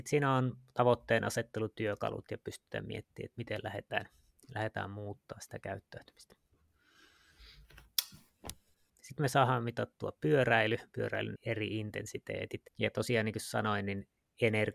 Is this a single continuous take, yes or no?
no